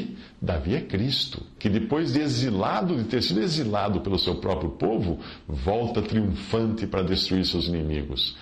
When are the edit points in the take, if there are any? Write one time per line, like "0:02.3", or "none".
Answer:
0:01.6